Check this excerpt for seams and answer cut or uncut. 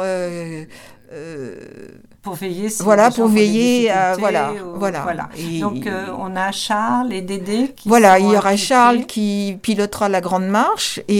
uncut